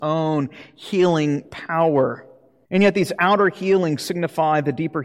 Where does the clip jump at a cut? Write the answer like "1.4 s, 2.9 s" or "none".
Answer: 2.7 s